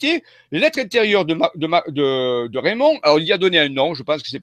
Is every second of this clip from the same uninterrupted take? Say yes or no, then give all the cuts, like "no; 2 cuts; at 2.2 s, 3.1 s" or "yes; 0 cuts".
yes; 0 cuts